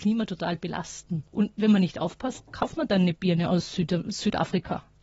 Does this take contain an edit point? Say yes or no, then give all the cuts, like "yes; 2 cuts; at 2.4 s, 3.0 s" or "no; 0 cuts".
yes; 1 cut; at 1.3 s